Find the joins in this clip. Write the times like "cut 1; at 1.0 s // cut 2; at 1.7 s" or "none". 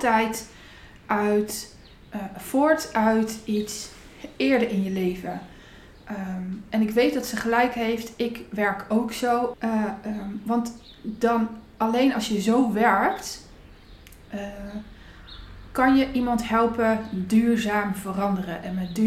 cut 1; at 9.5 s